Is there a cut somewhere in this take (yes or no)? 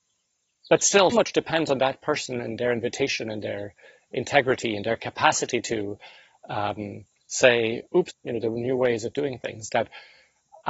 yes